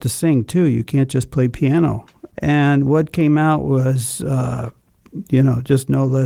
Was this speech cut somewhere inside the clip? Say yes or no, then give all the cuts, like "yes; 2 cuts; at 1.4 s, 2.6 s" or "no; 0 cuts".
yes; 1 cut; at 2.3 s